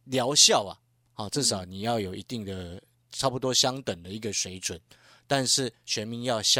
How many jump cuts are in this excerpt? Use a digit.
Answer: 0